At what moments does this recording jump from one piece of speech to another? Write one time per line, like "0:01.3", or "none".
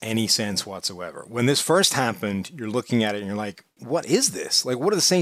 0:03.8